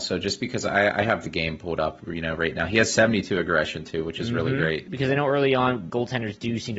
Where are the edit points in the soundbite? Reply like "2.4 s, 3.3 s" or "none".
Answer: 4.9 s, 5.9 s